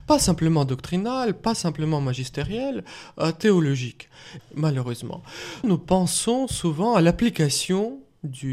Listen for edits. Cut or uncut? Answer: cut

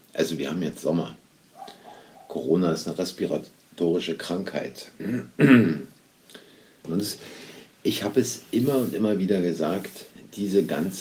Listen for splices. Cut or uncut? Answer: cut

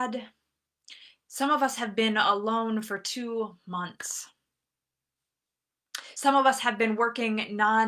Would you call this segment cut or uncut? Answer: uncut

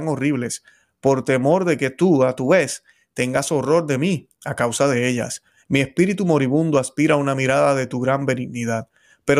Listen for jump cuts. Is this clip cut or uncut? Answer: cut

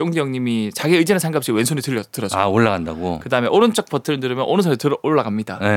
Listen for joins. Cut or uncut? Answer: uncut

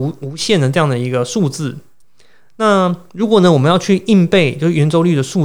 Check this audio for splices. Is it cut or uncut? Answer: uncut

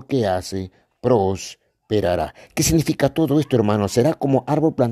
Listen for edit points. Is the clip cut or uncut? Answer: uncut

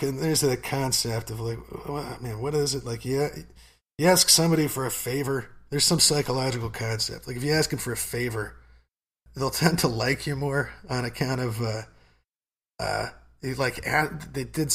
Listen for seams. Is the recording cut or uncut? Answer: cut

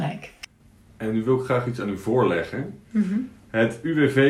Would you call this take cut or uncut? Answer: uncut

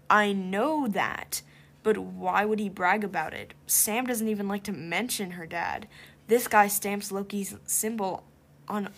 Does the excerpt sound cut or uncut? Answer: uncut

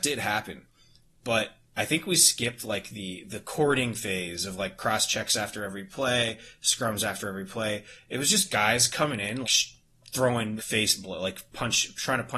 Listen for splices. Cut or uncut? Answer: cut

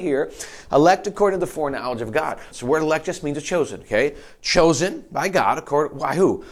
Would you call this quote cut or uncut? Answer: cut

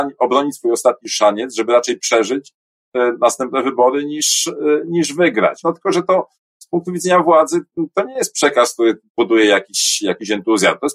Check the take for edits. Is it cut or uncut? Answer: cut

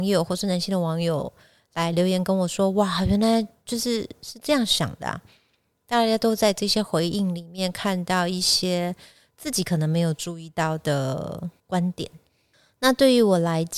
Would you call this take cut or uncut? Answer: cut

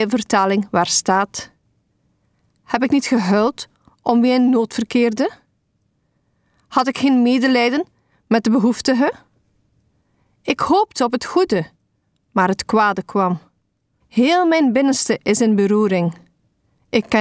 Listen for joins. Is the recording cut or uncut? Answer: cut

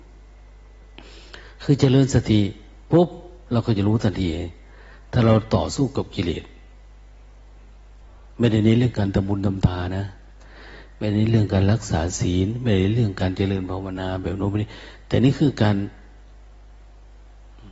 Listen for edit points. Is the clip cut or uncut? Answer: cut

